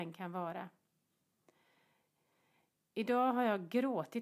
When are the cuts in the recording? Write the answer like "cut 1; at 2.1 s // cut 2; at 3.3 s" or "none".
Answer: none